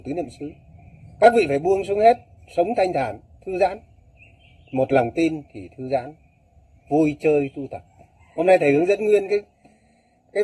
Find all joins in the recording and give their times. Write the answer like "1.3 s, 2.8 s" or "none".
8.3 s